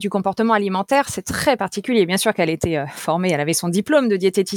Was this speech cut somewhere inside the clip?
no; 0 cuts

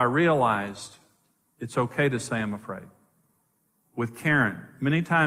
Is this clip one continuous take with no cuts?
yes; 0 cuts

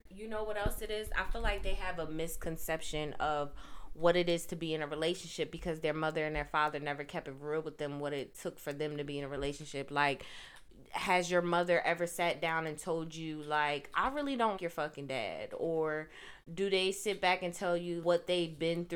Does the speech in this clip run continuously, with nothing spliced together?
no; 2 cuts; at 14.6 s, 18.0 s

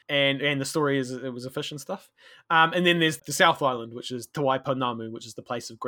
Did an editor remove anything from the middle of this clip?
yes; 1 cut; at 3.2 s

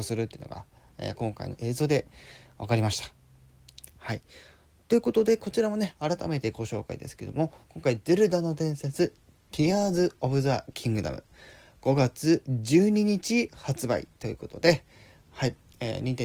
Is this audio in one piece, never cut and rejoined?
no; 1 cut; at 3.9 s

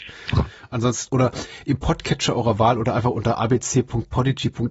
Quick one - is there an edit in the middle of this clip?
yes; 1 cut; at 1.1 s

